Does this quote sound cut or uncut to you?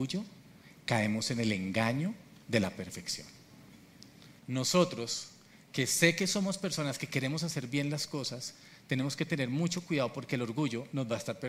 cut